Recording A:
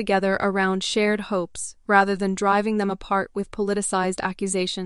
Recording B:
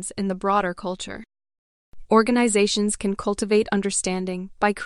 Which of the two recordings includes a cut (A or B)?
B